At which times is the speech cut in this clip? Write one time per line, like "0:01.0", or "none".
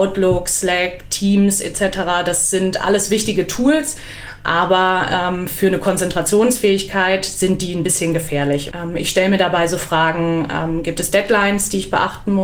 0:08.7